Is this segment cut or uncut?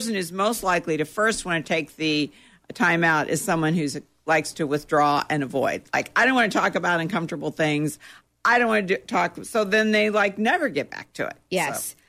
uncut